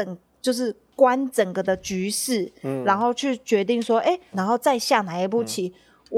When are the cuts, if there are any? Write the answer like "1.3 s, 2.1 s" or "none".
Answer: 4.3 s